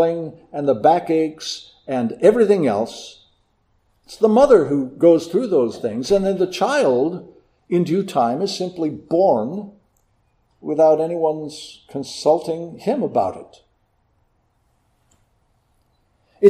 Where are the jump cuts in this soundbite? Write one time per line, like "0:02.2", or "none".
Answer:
none